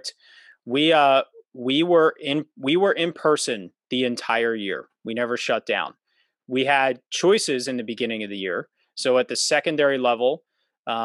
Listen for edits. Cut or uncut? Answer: uncut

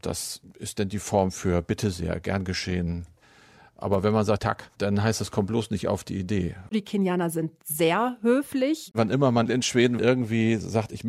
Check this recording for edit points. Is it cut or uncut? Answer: cut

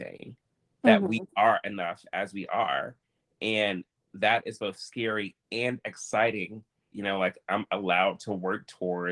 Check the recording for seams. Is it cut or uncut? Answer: cut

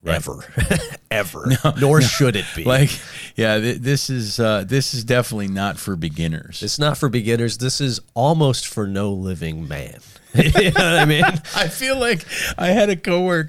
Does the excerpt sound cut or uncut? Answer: uncut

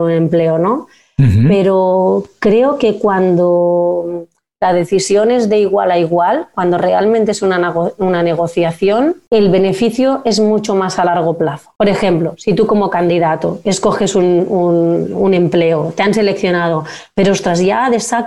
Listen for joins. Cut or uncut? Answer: uncut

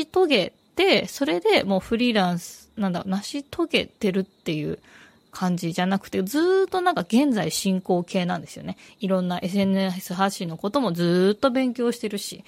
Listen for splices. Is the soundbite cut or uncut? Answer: uncut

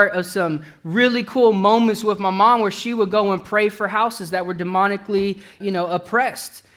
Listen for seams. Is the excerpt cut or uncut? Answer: cut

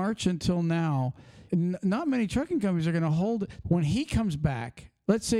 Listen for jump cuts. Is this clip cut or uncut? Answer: cut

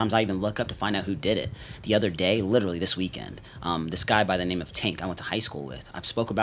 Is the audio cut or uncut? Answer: uncut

